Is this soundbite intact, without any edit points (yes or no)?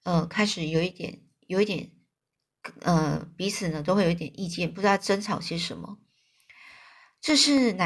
yes